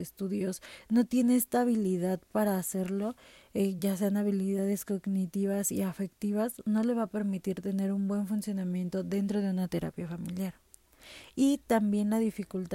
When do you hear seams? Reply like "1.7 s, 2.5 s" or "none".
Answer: none